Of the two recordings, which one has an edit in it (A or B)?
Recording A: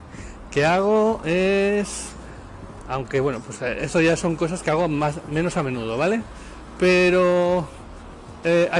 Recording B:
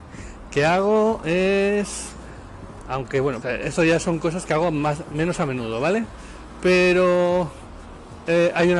B